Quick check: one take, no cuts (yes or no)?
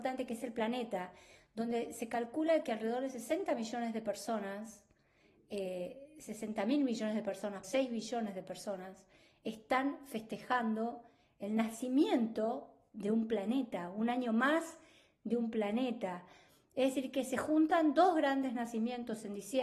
no